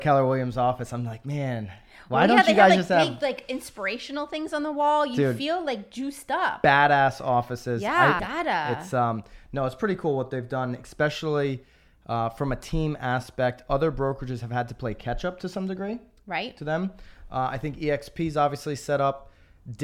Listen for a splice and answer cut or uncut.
cut